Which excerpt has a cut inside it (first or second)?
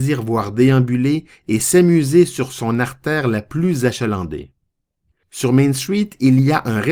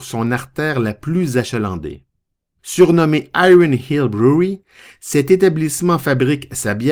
second